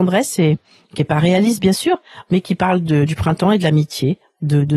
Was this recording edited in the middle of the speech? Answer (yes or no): no